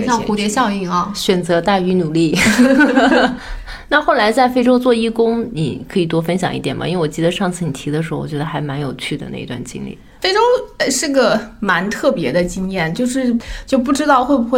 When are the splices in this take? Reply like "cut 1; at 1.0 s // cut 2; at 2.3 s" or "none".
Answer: cut 1; at 3.4 s